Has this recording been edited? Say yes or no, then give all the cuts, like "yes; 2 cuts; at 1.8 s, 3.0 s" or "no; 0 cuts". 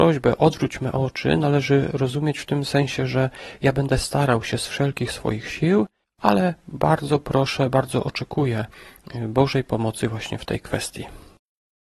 no; 0 cuts